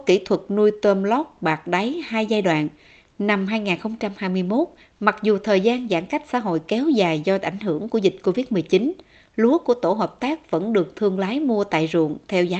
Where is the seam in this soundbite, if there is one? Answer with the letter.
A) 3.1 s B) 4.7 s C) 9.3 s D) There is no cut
A